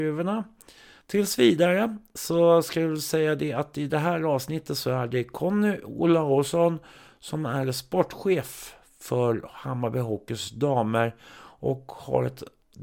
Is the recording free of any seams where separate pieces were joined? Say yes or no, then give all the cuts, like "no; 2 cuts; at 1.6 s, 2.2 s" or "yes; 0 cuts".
no; 1 cut; at 1.0 s